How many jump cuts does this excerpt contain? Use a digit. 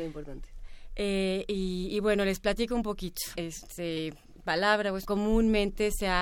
2